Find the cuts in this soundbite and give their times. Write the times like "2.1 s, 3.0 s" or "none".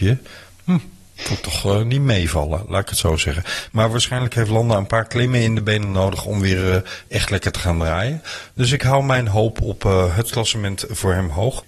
none

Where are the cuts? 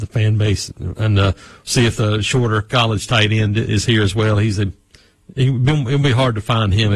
none

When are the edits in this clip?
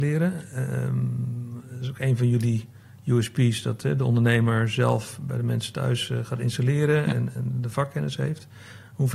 7.4 s

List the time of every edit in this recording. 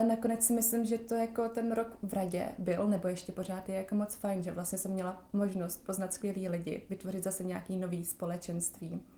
none

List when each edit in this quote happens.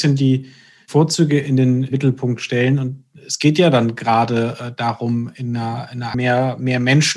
6.1 s

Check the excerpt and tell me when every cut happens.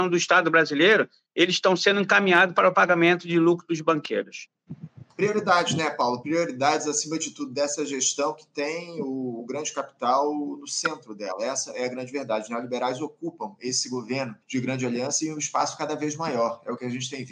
14.4 s

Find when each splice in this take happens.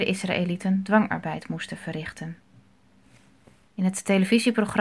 3.6 s

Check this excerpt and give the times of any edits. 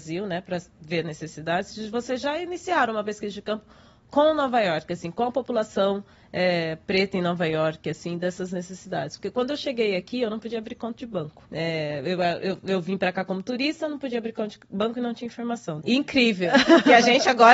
11.5 s, 15.8 s

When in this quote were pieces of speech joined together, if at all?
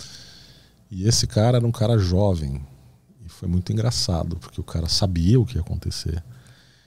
none

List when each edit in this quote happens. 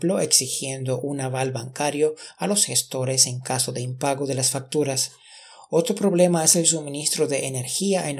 none

